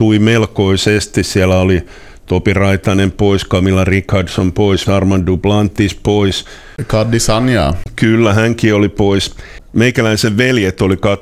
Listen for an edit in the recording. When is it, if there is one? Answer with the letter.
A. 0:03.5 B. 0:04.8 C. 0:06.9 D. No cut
B